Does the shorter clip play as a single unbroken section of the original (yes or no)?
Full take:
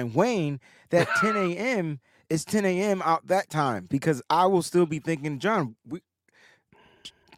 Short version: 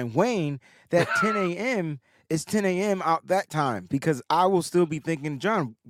yes